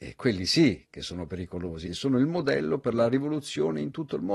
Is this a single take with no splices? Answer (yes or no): no